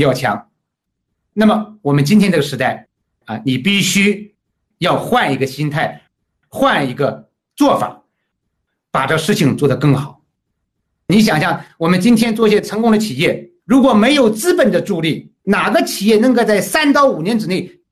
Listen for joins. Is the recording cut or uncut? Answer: cut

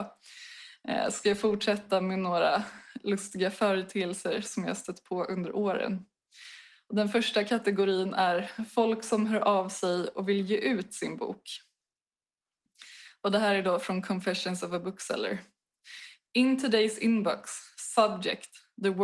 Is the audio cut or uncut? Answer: uncut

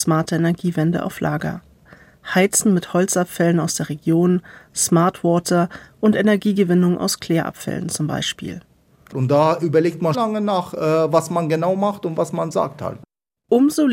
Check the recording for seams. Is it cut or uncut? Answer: cut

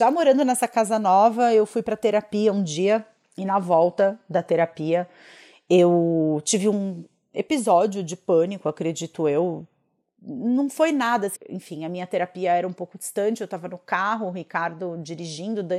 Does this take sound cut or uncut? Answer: cut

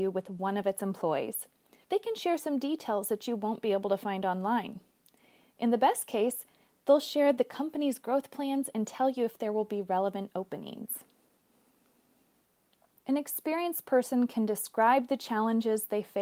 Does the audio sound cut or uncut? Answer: cut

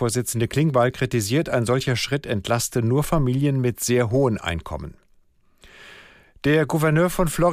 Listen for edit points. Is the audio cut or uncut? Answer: uncut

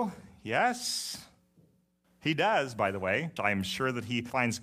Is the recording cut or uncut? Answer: cut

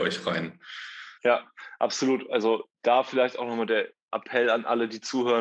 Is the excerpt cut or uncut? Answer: cut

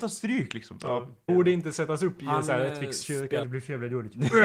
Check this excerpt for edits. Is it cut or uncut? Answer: cut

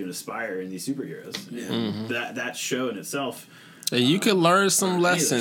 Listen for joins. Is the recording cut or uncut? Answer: uncut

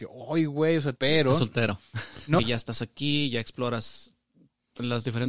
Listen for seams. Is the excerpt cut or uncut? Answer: cut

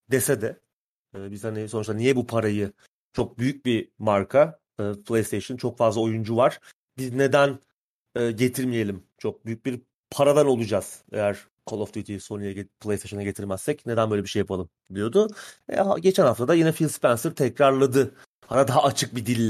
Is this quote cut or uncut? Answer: uncut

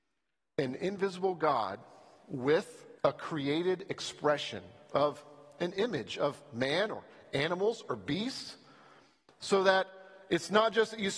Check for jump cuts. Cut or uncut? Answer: cut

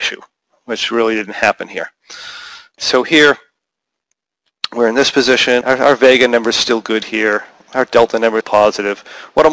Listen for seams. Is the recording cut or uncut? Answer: cut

